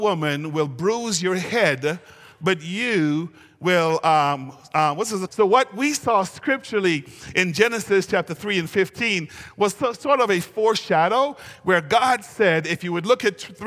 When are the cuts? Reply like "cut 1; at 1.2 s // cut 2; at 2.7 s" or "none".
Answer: cut 1; at 5.3 s